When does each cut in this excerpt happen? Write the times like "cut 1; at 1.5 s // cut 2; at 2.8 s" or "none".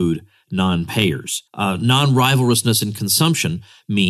cut 1; at 1.5 s